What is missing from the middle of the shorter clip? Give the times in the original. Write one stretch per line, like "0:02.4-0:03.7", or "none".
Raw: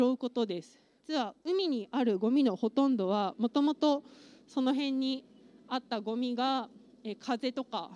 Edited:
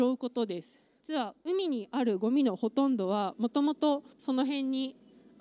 0:04.1-0:04.4